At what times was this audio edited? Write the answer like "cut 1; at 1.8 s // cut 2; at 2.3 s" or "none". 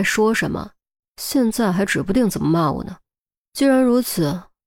cut 1; at 1.1 s